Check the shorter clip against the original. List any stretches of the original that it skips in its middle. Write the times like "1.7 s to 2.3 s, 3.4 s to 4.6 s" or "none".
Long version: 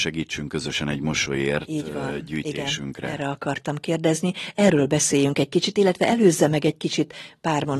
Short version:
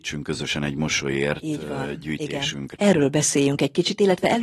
3.0 s to 4.5 s